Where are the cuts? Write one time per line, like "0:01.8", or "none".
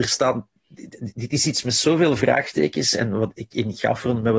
none